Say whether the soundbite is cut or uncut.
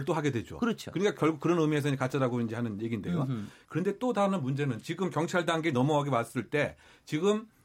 cut